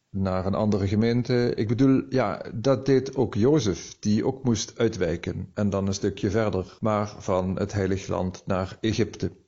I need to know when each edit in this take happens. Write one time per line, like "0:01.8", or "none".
0:06.8